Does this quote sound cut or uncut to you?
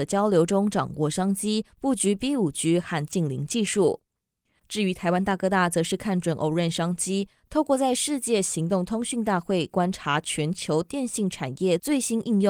cut